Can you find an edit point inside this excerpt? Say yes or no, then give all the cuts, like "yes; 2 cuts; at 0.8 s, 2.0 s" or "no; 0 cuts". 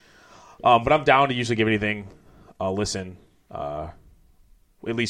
no; 0 cuts